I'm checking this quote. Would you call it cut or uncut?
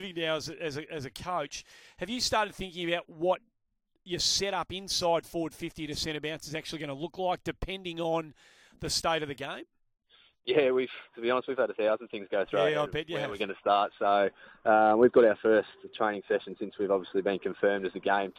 uncut